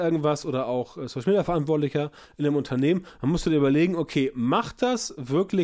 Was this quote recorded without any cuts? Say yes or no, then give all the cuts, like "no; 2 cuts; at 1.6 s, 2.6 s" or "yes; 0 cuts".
yes; 0 cuts